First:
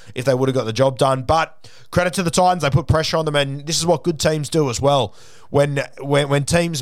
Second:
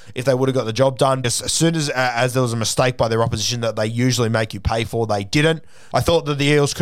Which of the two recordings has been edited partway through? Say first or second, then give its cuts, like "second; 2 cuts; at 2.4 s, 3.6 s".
second; 2 cuts; at 1.2 s, 5.9 s